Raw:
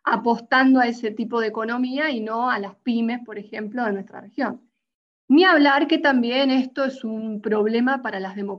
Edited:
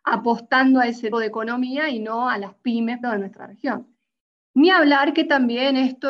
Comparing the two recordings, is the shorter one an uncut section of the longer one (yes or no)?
no